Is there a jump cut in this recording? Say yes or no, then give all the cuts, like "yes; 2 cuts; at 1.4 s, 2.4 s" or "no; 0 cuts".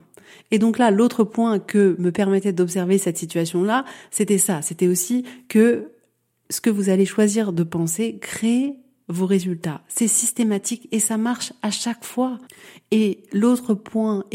no; 0 cuts